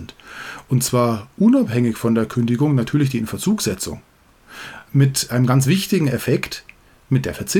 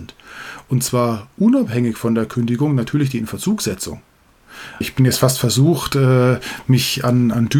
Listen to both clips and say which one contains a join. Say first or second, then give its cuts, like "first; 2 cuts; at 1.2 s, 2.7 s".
second; 1 cut; at 4.8 s